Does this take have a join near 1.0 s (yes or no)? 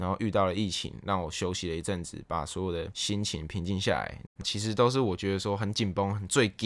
no